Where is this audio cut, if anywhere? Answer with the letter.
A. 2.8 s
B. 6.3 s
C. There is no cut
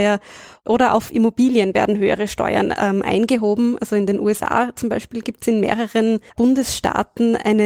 B